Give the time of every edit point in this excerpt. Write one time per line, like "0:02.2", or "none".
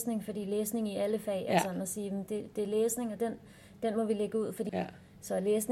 0:02.5
0:04.7